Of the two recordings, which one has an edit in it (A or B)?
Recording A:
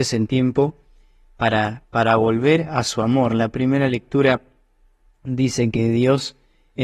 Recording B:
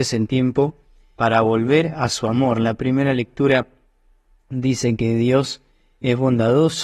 B